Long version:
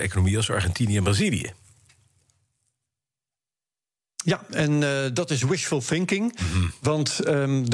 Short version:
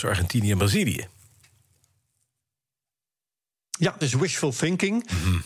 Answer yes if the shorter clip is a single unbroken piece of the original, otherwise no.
no